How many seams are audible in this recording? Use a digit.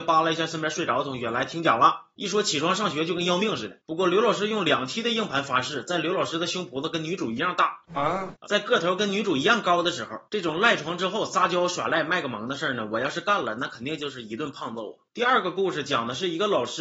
2